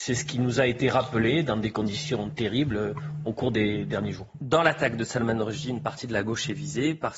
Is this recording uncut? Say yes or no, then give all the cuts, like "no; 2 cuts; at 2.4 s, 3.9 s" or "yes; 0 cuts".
yes; 0 cuts